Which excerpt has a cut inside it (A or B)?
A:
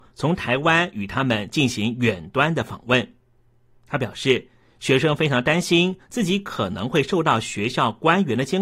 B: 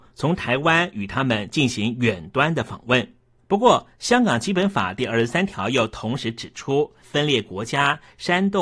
B